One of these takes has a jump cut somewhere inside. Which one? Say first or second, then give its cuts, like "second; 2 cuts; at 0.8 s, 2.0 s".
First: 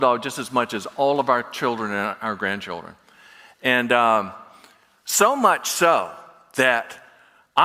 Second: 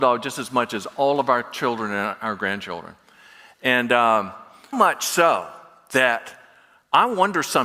second; 1 cut; at 4.7 s